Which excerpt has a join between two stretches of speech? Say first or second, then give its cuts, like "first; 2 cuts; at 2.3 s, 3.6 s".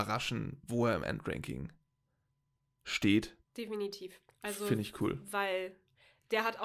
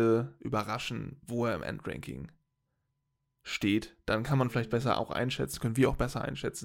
first; 1 cut; at 3.4 s